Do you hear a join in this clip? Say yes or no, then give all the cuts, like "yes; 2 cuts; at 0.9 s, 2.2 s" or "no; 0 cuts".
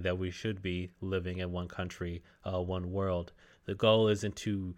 yes; 1 cut; at 3.5 s